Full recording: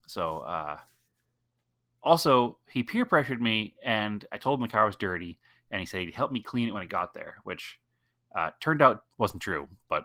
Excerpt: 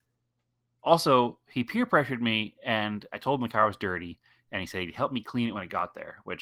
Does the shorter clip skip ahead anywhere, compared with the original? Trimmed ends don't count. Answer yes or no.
no